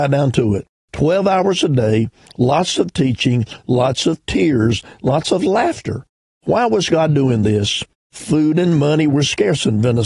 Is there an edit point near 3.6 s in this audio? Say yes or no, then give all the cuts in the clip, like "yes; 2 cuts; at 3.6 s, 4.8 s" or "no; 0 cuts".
yes; 1 cut; at 3.6 s